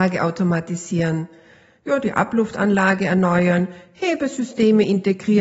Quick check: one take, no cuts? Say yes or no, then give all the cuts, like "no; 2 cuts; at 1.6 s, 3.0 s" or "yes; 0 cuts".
yes; 0 cuts